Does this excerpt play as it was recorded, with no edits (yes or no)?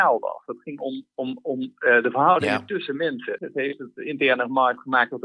no